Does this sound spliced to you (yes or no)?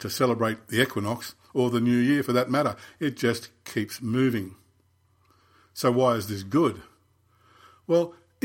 no